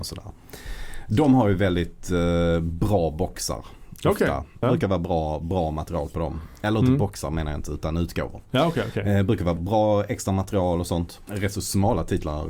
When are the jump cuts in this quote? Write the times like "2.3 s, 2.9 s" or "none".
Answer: 4.6 s, 9.6 s, 11.3 s